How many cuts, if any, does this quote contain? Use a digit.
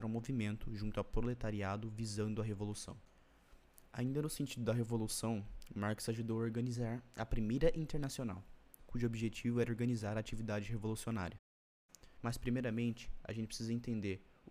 2